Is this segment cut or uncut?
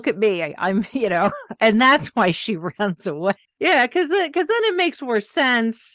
cut